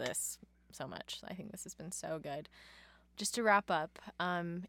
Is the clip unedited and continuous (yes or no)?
yes